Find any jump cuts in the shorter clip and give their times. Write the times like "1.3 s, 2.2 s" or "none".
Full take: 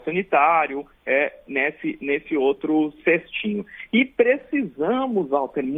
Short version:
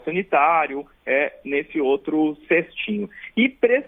1.4 s